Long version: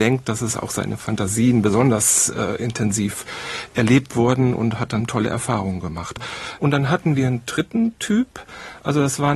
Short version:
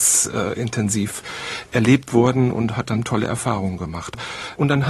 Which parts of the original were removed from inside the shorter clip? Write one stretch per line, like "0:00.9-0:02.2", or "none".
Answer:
none